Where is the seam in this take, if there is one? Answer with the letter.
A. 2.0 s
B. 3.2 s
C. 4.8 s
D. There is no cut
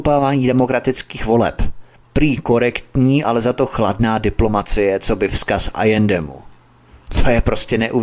D